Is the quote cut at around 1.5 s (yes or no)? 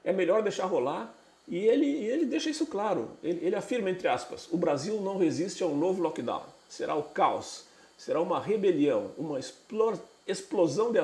no